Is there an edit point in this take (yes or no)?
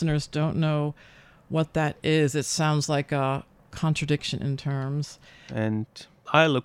yes